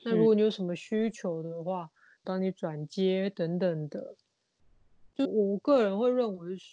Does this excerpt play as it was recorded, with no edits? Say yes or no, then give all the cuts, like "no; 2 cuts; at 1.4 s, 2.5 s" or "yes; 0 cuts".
no; 2 cuts; at 2.2 s, 5.2 s